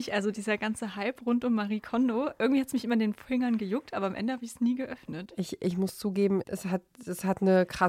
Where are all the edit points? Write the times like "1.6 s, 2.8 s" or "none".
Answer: 6.5 s